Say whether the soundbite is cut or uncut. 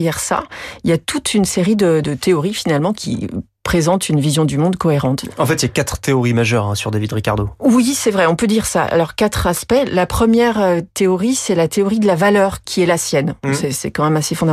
uncut